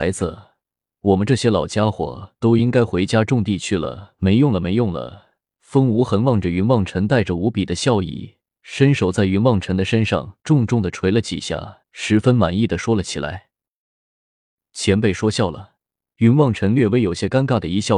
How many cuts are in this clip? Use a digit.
2